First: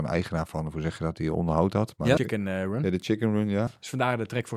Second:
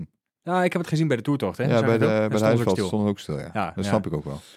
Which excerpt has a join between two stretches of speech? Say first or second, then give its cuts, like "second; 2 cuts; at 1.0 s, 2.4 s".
first; 2 cuts; at 2.2 s, 3.7 s